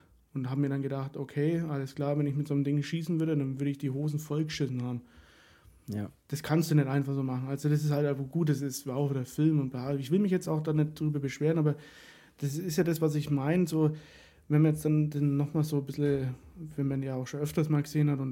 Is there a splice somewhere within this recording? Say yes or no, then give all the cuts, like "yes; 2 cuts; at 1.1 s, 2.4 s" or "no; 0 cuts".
no; 0 cuts